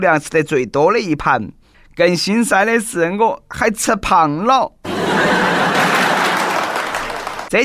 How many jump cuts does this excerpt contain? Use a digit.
1